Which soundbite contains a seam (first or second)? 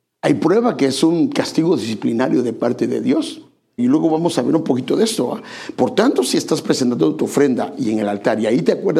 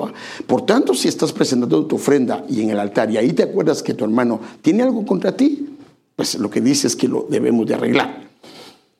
first